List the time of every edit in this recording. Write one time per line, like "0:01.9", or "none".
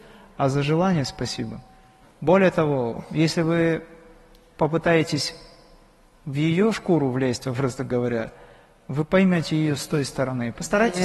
0:02.0